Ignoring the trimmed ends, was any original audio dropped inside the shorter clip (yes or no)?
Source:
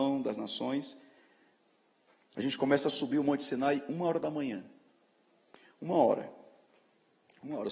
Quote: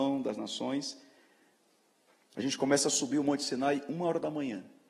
no